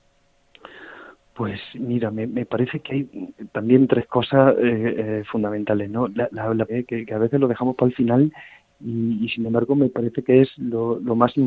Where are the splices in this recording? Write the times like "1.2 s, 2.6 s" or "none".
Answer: 6.7 s